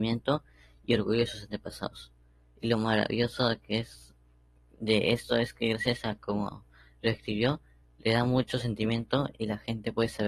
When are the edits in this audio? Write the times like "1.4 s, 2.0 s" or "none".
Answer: none